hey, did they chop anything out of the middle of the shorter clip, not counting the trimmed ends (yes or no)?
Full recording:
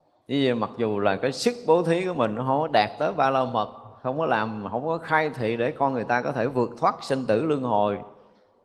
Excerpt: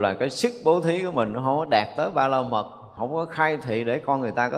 yes